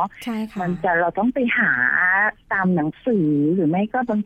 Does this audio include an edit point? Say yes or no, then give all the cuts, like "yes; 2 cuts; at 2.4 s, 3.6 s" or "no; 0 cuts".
yes; 1 cut; at 2.4 s